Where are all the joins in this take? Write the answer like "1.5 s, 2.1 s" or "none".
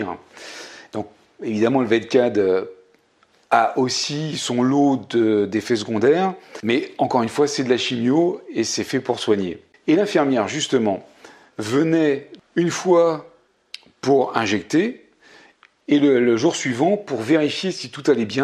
9.7 s